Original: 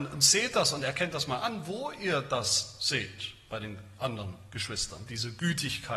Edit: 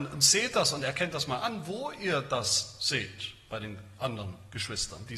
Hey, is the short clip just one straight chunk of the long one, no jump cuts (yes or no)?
yes